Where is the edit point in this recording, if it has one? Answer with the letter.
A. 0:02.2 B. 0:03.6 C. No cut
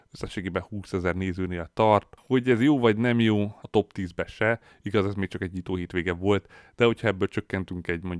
B